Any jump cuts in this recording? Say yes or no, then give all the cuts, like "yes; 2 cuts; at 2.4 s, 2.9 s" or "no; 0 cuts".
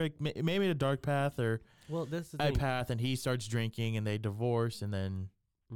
no; 0 cuts